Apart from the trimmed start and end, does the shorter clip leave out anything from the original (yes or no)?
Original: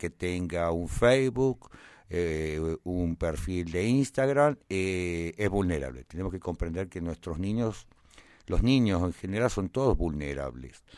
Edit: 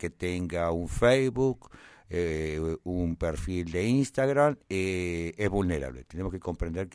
no